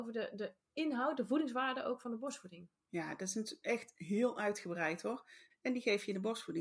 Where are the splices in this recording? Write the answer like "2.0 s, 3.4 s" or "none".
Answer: 5.5 s